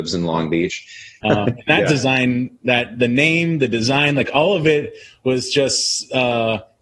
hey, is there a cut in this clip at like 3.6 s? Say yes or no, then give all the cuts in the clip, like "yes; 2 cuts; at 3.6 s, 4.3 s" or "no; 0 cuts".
no; 1 cut; at 1.2 s